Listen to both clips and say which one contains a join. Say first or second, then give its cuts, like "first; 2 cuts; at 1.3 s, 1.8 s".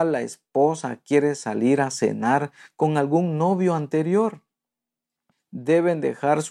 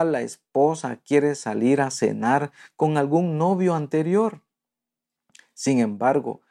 first; 1 cut; at 5.3 s